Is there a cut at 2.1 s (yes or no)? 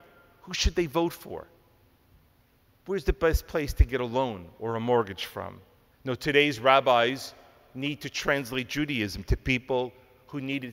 no